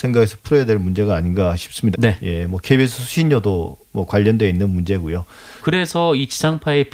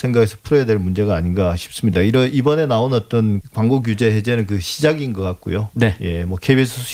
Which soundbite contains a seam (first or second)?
first